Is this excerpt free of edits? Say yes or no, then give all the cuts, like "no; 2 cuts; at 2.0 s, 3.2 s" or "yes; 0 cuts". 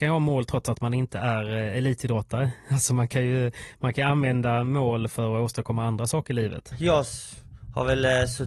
no; 1 cut; at 6.7 s